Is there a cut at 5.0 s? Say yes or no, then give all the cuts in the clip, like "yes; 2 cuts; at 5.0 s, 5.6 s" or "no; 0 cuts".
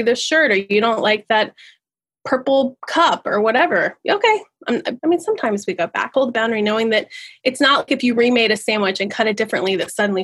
yes; 3 cuts; at 5.0 s, 6.1 s, 7.9 s